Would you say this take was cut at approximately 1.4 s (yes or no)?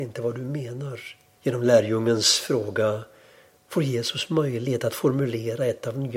yes